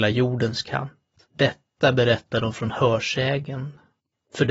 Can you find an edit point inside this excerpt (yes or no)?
yes